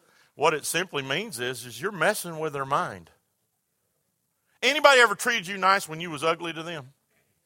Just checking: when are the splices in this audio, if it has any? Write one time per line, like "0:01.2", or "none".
none